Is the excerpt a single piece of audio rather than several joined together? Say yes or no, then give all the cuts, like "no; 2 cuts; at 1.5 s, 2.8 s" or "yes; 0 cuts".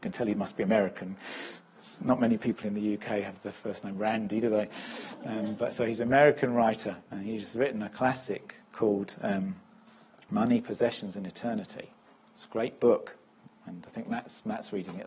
yes; 0 cuts